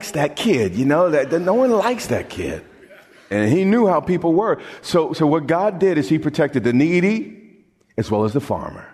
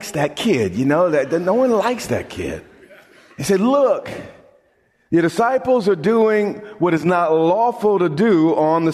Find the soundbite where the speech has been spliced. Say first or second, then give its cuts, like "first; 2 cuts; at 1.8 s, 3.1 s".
first; 1 cut; at 3.3 s